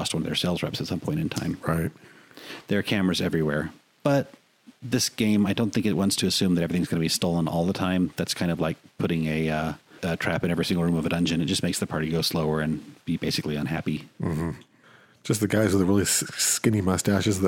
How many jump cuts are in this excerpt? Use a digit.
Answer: 0